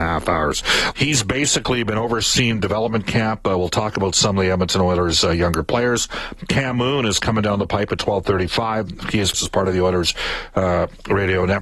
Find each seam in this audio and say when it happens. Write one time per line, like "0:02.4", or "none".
0:00.9
0:09.3